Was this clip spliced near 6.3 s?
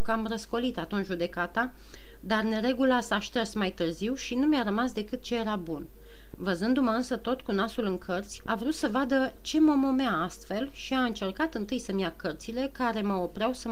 yes; 2 cuts; at 6.3 s, 8.5 s

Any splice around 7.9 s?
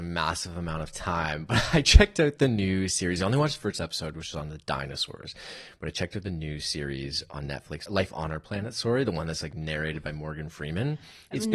yes; 1 cut; at 7.9 s

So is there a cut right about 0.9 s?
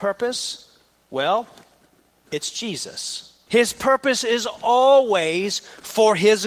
no; 1 cut; at 3.5 s

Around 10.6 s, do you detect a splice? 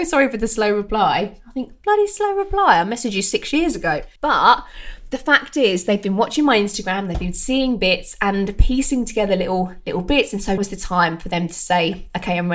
yes; 2 cuts; at 4.2 s, 10.6 s

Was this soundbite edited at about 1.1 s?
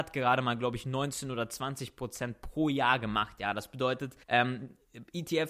no; 1 cut; at 4.2 s

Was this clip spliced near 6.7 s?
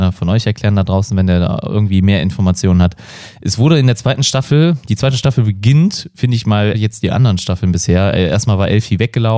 yes; 1 cut; at 6.7 s

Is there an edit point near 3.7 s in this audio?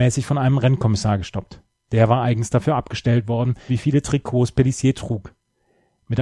yes; 1 cut; at 3.7 s

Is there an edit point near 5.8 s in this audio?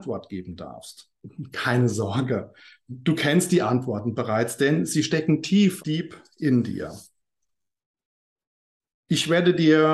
yes; 1 cut; at 5.8 s

